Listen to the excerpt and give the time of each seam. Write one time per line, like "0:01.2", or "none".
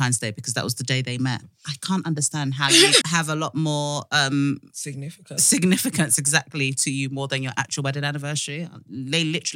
0:03.0

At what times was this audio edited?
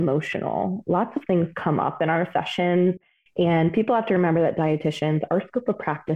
none

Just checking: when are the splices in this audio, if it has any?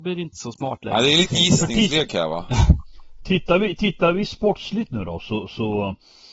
none

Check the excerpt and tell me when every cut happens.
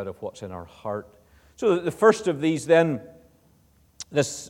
none

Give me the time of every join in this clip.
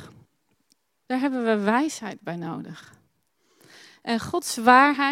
0:01.0

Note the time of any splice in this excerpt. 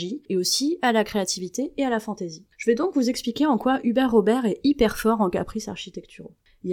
0:02.5

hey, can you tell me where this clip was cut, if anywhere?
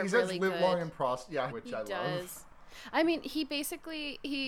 0:01.5

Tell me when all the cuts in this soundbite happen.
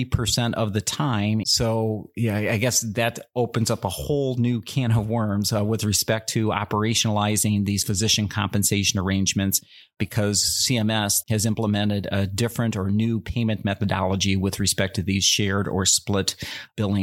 0:01.4
0:11.2

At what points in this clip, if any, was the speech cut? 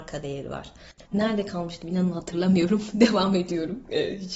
0:01.1

